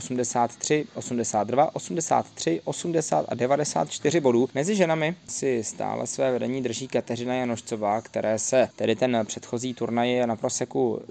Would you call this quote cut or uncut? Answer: cut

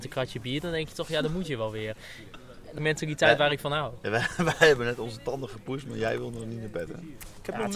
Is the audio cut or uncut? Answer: cut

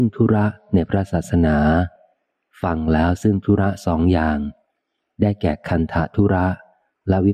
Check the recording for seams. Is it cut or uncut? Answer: uncut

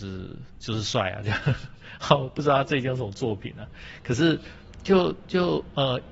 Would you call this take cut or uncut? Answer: uncut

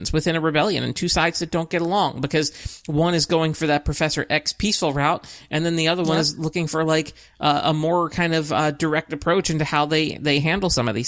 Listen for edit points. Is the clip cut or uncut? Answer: uncut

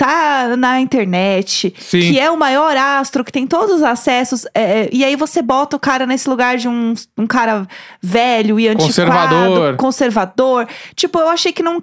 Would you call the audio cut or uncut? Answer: uncut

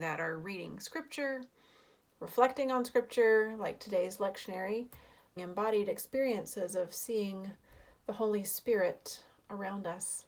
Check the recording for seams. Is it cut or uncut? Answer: cut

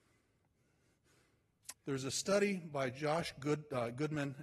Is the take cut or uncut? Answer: cut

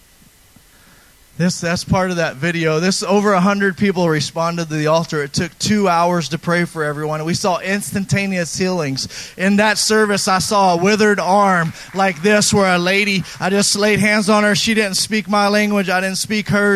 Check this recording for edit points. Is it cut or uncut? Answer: uncut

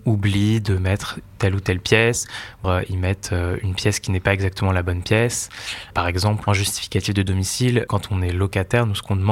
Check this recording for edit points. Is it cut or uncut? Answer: cut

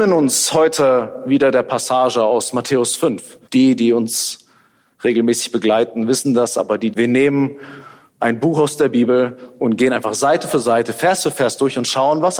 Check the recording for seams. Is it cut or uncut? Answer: cut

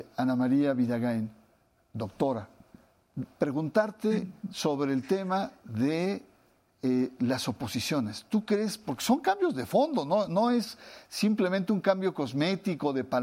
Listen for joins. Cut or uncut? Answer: uncut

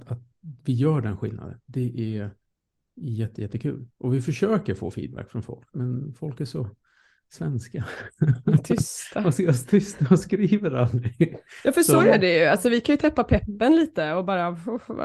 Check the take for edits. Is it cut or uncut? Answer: uncut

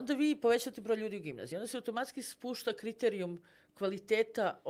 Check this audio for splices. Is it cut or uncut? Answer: uncut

